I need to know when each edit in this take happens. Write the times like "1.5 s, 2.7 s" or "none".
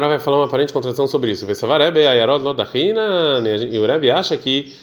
none